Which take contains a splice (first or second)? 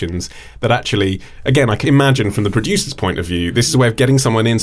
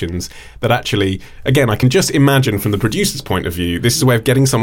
first